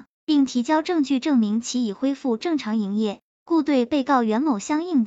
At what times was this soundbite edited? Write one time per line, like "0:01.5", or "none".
0:03.3